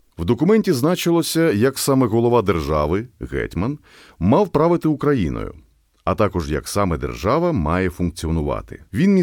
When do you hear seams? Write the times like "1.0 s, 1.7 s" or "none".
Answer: none